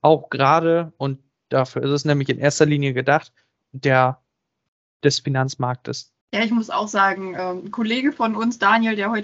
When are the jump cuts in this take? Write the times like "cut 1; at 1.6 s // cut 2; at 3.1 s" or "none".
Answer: cut 1; at 3.6 s // cut 2; at 6.2 s